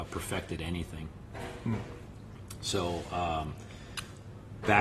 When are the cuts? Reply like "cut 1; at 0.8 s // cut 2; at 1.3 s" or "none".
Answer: none

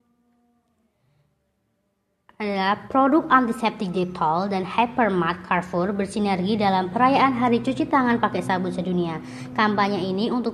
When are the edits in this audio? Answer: none

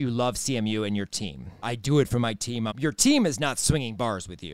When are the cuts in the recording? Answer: cut 1; at 1.6 s // cut 2; at 2.7 s

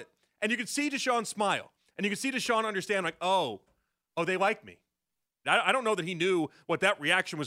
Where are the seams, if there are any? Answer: cut 1; at 5.4 s

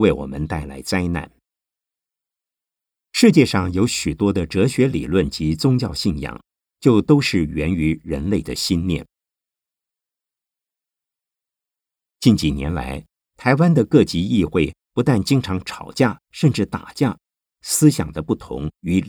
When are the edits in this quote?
cut 1; at 17.5 s

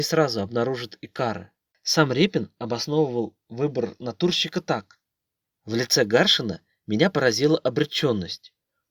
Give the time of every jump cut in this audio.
cut 1; at 1.7 s

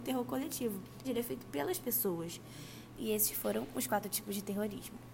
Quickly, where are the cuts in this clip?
cut 1; at 1.0 s // cut 2; at 2.9 s

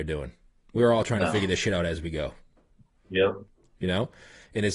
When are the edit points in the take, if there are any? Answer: none

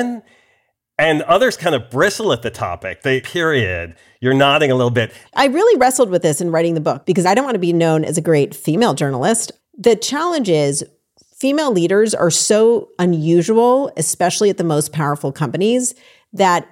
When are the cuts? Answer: cut 1; at 3.2 s // cut 2; at 5.2 s // cut 3; at 9.6 s

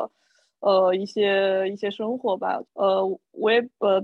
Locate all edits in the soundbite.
cut 1; at 2.6 s

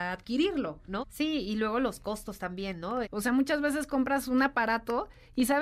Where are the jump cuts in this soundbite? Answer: cut 1; at 1.0 s // cut 2; at 3.0 s

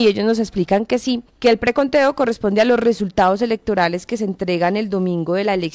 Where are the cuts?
cut 1; at 1.3 s

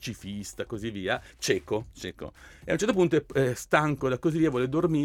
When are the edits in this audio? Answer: none

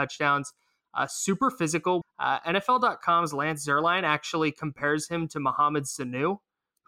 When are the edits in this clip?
cut 1; at 2.0 s

